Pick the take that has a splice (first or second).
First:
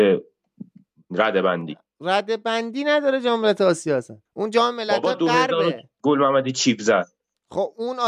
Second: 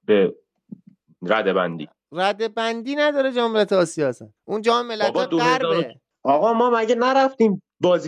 first